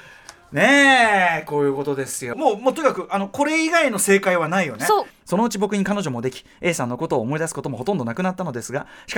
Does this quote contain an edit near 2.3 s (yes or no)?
yes